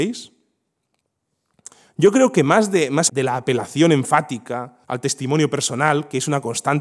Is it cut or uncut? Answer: cut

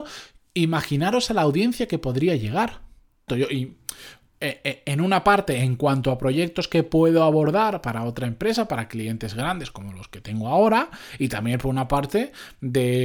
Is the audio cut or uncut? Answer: cut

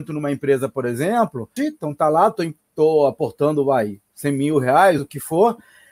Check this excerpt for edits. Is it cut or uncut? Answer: cut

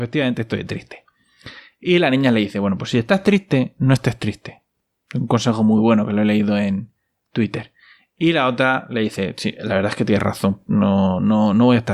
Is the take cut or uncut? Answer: uncut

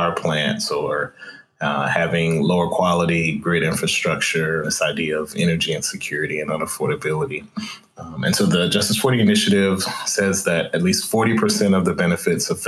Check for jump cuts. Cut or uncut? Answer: cut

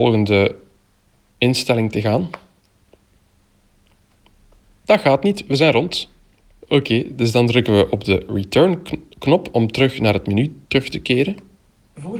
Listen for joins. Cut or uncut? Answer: cut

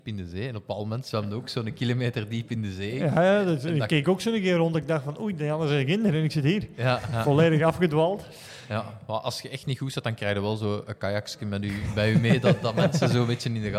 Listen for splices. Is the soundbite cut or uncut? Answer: uncut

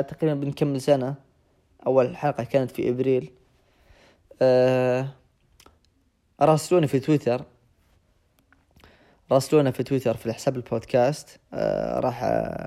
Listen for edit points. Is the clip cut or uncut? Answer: cut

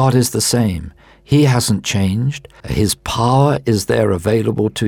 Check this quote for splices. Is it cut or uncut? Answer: cut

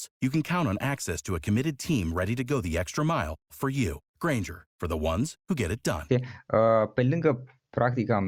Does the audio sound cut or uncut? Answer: cut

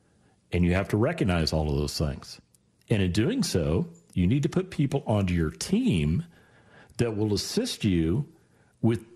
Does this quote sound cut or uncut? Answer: uncut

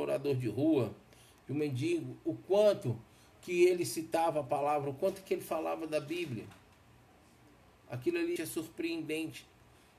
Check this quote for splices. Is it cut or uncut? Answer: cut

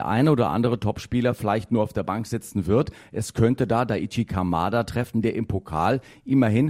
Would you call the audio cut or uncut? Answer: uncut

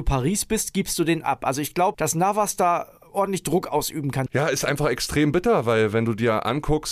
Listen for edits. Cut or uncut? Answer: cut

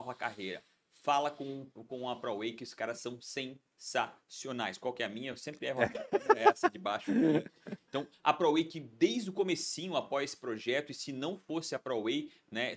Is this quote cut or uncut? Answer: uncut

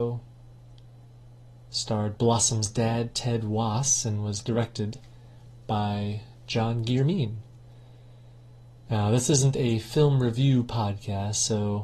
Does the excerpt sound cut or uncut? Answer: uncut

